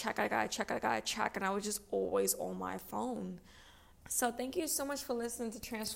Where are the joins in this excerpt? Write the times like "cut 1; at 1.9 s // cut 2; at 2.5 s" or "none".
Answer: cut 1; at 4.0 s